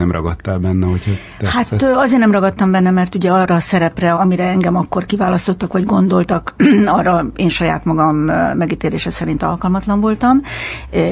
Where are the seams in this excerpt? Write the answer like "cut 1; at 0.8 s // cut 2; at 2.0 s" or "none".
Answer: cut 1; at 4.1 s